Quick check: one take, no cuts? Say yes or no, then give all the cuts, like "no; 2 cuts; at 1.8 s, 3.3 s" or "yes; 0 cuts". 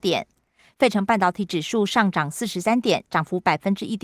yes; 0 cuts